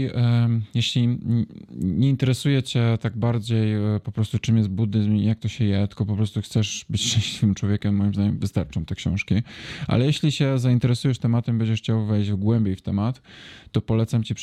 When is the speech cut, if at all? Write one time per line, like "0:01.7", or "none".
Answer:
none